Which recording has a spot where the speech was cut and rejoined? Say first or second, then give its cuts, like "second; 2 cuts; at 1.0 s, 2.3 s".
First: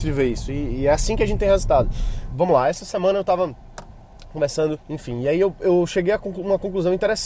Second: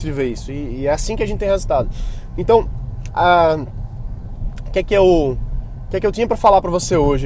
first; 2 cuts; at 2.3 s, 4.8 s